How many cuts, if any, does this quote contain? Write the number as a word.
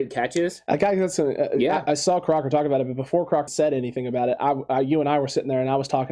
one